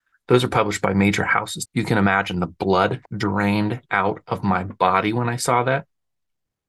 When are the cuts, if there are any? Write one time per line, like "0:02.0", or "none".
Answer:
0:01.7
0:03.1